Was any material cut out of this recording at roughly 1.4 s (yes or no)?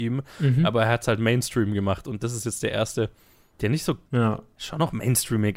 no